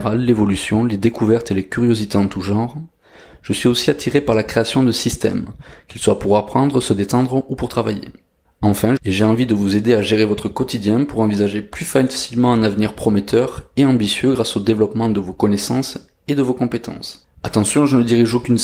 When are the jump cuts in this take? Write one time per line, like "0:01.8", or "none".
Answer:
0:09.0